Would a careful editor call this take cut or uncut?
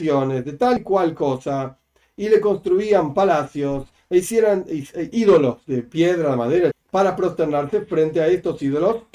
cut